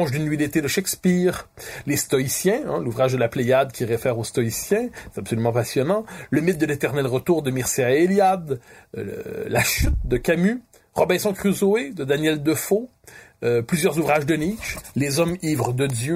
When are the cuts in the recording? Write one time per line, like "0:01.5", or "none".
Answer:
0:14.9